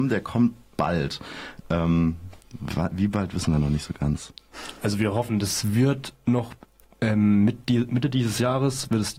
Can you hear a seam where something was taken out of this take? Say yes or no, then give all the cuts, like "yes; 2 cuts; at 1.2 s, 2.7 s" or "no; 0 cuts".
no; 0 cuts